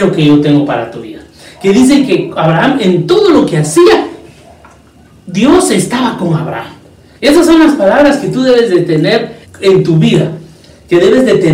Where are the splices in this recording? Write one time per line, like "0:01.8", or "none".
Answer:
0:07.1
0:09.4